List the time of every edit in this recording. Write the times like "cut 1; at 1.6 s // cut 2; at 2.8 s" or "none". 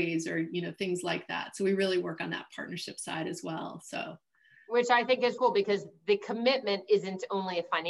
cut 1; at 5.4 s